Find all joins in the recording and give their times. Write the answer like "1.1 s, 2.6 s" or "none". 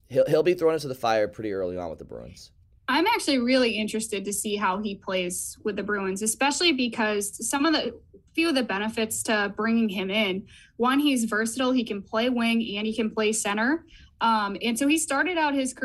none